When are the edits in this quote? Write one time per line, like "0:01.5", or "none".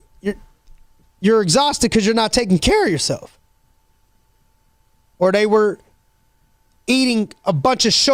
0:05.0